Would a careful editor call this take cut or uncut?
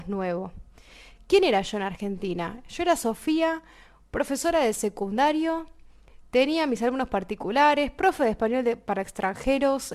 uncut